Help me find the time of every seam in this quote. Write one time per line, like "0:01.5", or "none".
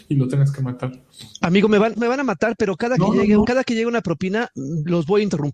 0:02.0
0:03.4